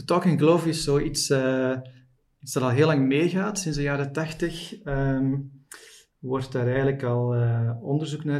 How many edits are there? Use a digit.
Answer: 0